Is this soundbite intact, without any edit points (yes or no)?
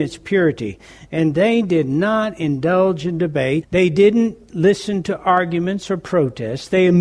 no